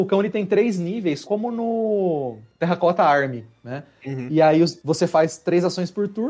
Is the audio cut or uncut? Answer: cut